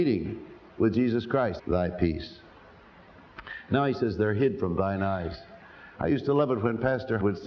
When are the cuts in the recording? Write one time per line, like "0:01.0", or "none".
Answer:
0:01.6
0:05.9